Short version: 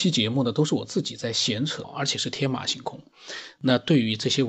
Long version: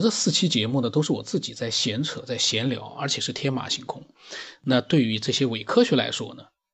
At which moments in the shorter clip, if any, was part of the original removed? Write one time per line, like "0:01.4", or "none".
0:01.8